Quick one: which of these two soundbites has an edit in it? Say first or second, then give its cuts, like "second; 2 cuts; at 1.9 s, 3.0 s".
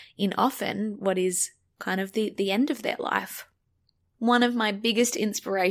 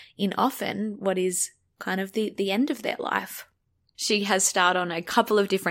second; 1 cut; at 3.9 s